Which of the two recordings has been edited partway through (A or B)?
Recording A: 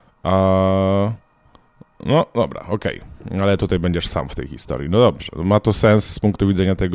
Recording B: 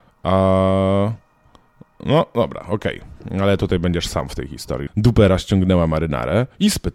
B